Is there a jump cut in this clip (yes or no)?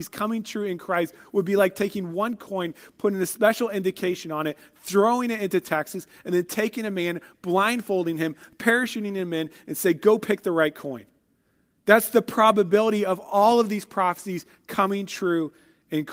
no